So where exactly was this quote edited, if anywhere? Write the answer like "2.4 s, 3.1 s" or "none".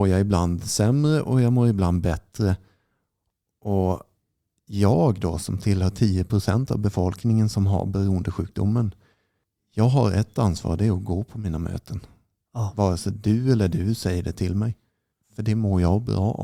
none